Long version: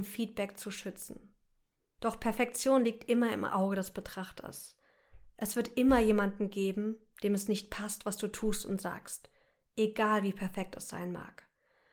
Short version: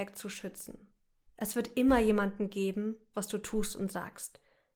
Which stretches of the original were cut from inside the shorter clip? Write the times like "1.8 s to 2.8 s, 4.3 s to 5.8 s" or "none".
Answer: 1.7 s to 5.3 s, 7.1 s to 8.0 s